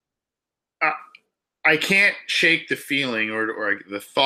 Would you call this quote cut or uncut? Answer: uncut